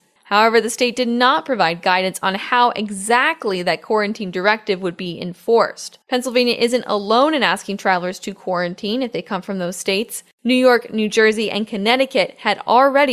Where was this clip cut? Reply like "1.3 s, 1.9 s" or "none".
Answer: 6.0 s